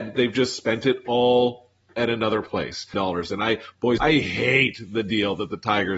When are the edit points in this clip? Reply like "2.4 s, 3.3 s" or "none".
2.9 s, 4.0 s